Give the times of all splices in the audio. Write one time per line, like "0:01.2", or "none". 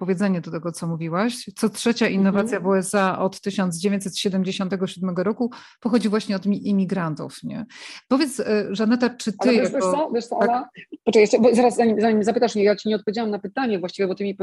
none